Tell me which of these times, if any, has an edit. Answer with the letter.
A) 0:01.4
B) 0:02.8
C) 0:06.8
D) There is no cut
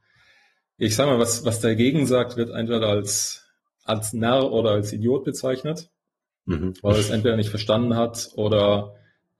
D